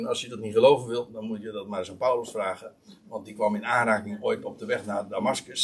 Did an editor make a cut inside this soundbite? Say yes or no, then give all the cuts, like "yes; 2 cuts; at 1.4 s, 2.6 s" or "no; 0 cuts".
no; 0 cuts